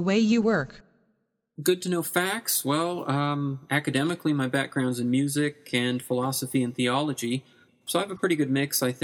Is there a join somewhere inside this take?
yes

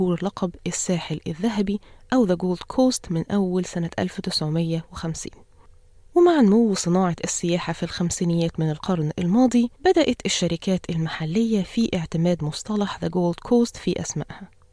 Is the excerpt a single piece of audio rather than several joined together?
no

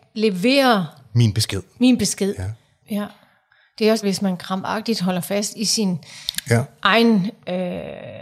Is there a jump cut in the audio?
yes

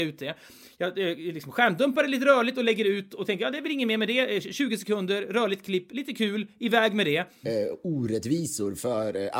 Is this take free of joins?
no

